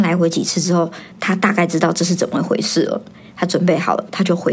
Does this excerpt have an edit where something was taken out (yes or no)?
yes